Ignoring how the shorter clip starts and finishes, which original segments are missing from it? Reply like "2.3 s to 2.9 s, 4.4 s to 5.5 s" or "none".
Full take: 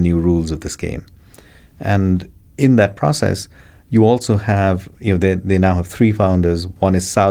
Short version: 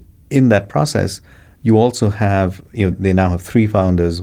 5.2 s to 5.4 s